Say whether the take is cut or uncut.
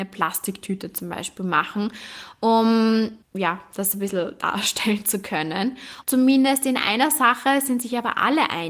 cut